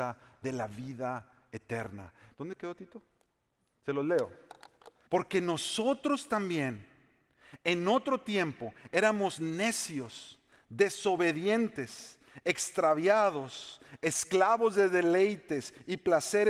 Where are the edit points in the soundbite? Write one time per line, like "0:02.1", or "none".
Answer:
0:02.3
0:05.1